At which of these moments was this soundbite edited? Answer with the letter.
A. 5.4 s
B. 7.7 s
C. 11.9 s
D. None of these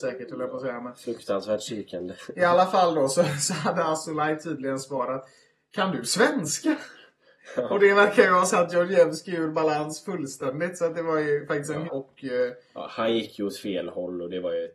C